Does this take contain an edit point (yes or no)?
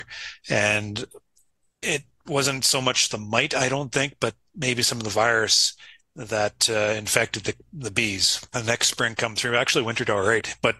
yes